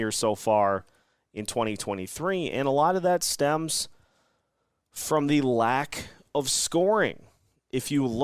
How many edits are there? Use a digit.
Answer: 0